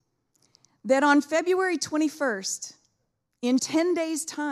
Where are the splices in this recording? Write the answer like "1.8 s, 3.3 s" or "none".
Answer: 3.6 s